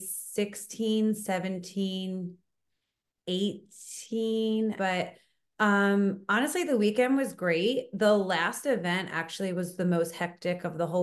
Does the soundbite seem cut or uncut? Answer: cut